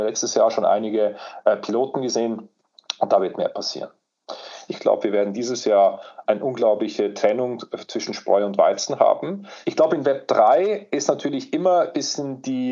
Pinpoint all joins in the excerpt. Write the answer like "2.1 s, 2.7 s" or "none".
4.7 s, 9.6 s